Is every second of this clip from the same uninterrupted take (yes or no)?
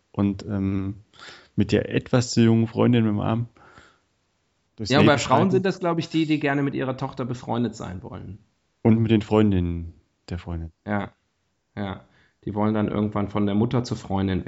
yes